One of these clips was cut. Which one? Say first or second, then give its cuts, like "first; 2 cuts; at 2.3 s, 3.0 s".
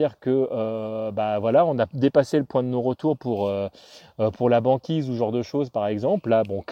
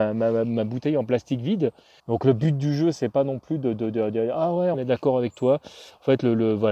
second; 2 cuts; at 2.0 s, 4.7 s